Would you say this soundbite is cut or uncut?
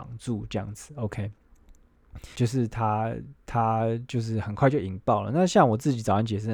cut